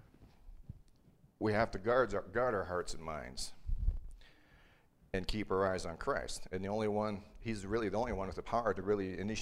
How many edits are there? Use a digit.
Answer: 0